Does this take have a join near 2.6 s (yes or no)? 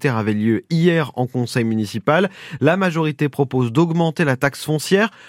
no